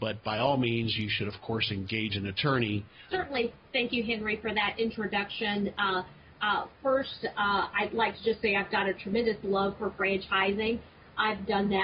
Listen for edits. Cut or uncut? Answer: cut